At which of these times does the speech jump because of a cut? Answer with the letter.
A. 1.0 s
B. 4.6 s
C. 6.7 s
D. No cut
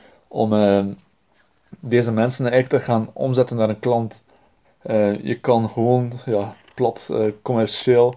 B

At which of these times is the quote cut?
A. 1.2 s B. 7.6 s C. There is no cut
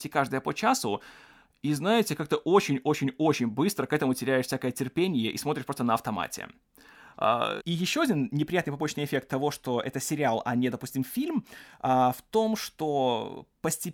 B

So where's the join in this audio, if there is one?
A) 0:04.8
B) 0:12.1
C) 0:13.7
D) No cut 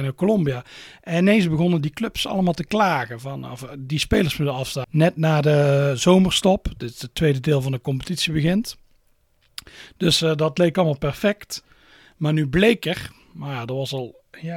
A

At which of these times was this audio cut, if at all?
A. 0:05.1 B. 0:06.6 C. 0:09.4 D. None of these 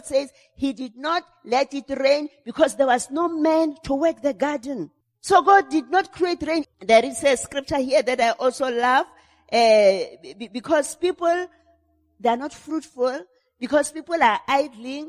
B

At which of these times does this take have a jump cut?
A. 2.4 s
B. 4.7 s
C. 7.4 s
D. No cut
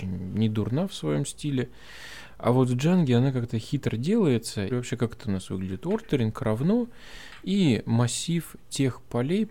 B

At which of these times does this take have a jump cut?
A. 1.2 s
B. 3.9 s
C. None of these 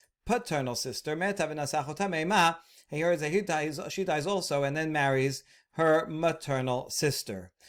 C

